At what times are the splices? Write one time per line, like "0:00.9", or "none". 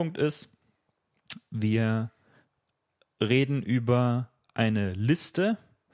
none